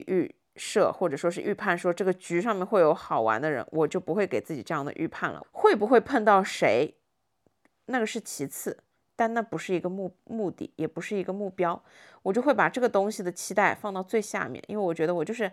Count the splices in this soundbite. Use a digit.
1